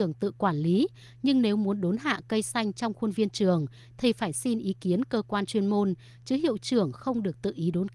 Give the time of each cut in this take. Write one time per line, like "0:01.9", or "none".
none